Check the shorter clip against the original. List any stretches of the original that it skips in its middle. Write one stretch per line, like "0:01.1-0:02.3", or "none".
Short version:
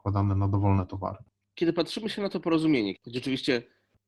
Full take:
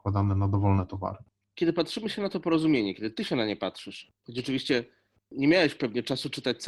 0:02.9-0:04.2